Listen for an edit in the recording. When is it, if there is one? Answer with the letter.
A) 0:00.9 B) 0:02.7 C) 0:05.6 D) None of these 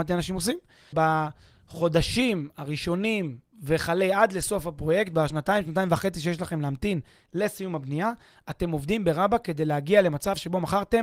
A